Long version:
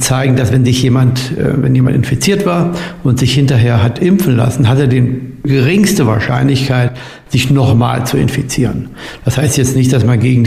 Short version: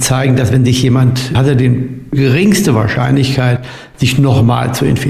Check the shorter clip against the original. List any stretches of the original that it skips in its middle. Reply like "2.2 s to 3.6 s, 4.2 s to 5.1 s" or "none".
1.3 s to 4.7 s